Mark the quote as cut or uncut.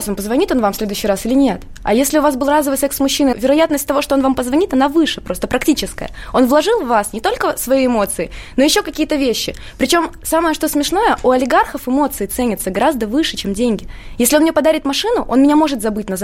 cut